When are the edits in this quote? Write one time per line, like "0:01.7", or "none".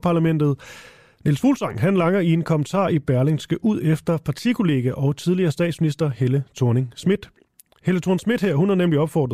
none